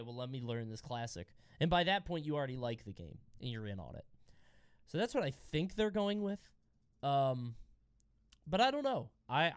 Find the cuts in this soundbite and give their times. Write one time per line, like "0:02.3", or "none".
none